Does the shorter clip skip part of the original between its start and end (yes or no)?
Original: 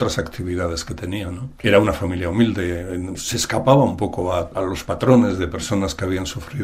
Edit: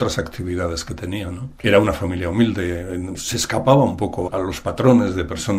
yes